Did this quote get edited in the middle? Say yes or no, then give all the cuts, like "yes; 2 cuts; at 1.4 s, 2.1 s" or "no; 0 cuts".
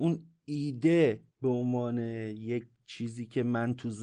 yes; 1 cut; at 1.3 s